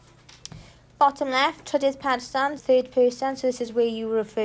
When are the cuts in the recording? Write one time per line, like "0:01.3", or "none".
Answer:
0:02.6